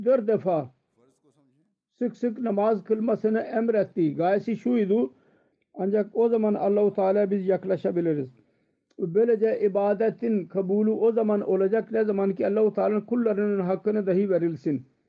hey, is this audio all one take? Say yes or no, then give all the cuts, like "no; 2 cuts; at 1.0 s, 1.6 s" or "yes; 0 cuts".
no; 1 cut; at 5.5 s